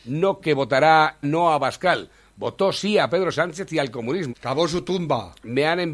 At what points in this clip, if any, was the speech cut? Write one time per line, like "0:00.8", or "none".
0:01.2
0:04.3